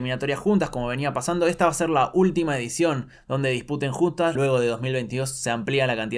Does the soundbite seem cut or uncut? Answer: cut